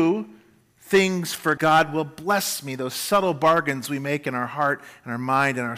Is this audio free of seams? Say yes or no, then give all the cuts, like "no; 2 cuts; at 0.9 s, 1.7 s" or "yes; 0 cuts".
no; 1 cut; at 1.6 s